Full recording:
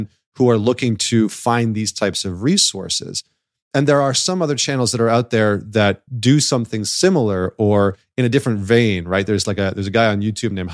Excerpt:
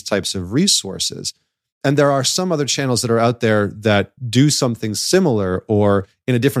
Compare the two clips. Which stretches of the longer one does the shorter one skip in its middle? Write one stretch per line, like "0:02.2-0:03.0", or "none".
none